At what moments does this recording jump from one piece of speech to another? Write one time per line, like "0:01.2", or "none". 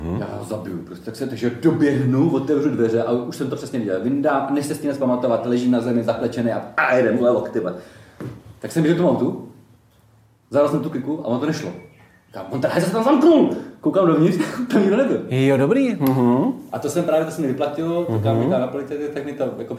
none